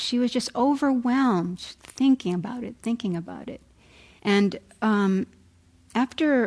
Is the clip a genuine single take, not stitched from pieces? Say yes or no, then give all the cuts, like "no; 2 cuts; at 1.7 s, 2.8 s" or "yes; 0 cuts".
no; 1 cut; at 4.2 s